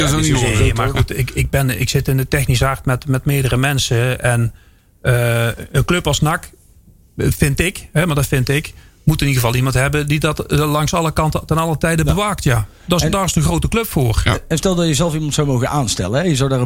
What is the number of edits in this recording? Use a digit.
0